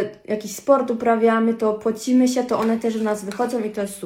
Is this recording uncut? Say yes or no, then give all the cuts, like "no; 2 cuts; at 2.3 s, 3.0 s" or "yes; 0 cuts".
yes; 0 cuts